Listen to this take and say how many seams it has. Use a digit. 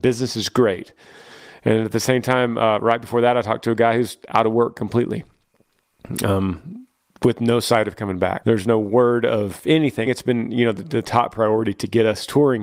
2